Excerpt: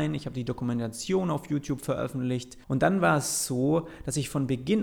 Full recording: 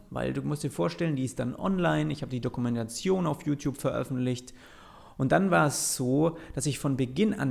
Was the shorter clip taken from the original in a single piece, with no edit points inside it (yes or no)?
no